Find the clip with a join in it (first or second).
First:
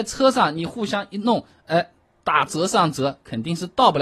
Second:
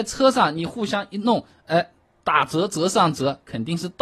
first